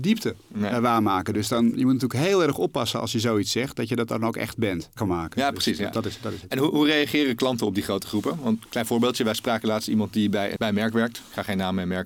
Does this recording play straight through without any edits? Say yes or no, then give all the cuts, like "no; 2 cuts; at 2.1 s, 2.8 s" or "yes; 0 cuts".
no; 2 cuts; at 5.0 s, 10.6 s